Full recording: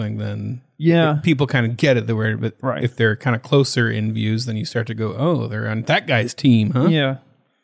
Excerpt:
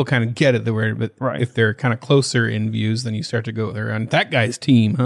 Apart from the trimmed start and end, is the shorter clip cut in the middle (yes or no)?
yes